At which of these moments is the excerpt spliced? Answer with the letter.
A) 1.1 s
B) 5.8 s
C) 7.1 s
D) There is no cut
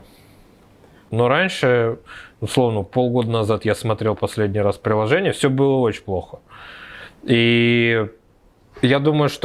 A